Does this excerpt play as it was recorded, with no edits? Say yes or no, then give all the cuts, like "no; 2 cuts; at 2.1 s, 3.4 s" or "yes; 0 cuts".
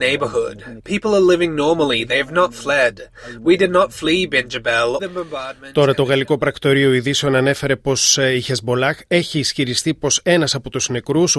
no; 1 cut; at 5.0 s